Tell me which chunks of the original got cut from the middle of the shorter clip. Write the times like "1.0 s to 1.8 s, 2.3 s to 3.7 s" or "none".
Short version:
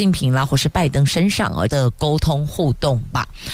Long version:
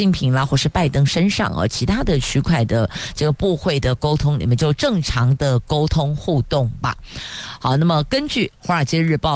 1.7 s to 5.4 s